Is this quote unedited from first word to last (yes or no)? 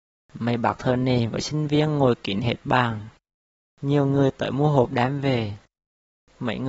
yes